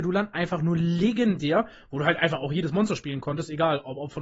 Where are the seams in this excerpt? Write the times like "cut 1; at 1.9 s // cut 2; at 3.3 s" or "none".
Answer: none